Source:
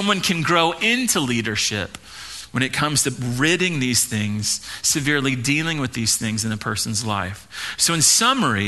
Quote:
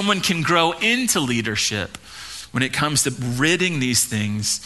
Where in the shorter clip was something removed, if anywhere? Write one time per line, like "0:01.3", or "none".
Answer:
none